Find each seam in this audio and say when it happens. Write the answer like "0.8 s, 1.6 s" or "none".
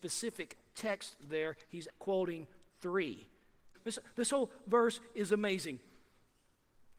1.9 s, 3.7 s